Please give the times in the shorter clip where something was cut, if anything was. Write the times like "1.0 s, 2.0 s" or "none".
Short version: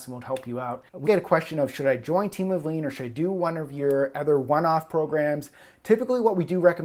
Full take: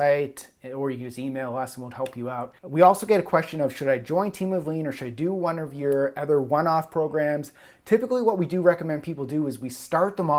1.0 s